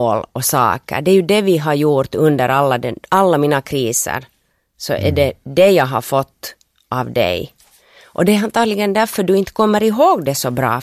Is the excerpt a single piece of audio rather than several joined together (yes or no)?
yes